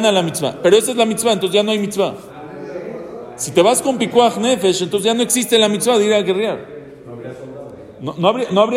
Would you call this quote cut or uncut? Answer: uncut